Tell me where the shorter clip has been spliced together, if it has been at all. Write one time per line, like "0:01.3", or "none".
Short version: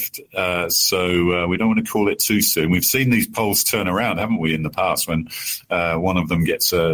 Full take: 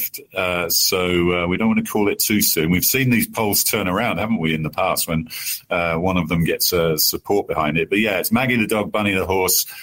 none